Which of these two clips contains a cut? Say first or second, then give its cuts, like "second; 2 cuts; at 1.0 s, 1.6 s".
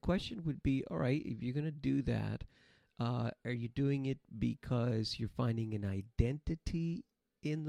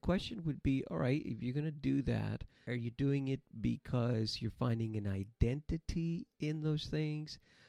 second; 2 cuts; at 2.6 s, 6.3 s